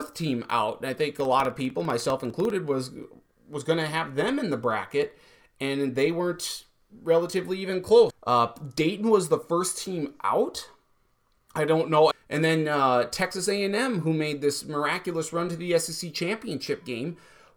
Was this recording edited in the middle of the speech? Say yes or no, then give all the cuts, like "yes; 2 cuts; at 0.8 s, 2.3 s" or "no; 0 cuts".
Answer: yes; 2 cuts; at 8.1 s, 12.1 s